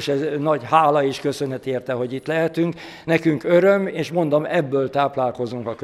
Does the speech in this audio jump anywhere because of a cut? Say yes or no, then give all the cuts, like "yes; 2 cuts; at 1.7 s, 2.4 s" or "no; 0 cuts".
no; 0 cuts